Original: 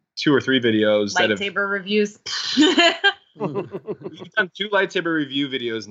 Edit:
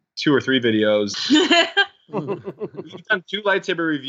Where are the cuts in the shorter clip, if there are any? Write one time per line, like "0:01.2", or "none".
0:01.1